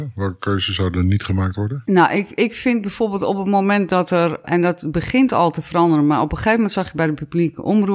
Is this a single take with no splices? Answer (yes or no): yes